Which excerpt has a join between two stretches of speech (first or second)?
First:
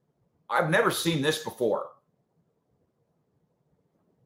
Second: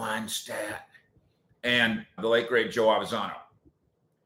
second